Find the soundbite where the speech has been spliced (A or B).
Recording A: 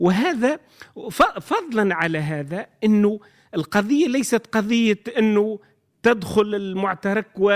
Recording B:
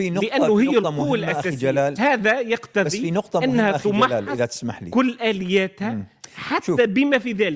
B